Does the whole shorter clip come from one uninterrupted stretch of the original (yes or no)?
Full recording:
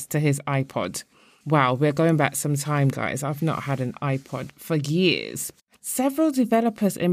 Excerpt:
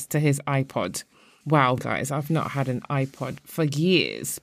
no